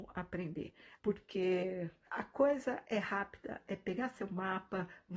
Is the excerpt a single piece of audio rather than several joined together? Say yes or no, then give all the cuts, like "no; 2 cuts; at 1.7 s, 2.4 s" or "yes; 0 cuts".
no; 2 cuts; at 1.0 s, 3.6 s